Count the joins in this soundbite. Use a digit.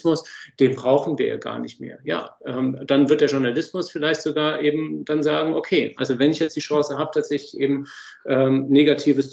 0